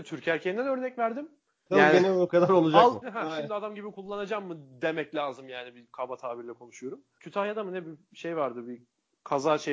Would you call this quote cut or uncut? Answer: cut